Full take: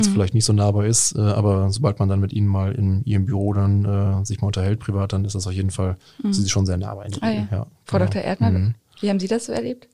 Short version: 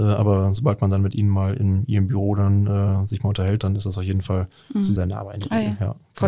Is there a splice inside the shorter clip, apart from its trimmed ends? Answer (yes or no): yes